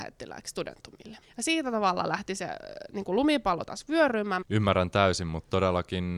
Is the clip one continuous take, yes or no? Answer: no